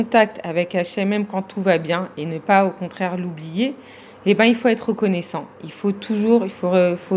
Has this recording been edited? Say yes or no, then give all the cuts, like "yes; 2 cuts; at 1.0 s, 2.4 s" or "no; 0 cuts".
no; 0 cuts